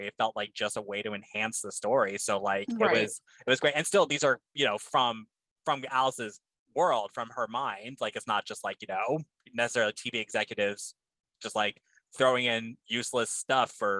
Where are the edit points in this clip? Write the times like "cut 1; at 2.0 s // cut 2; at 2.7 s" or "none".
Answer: none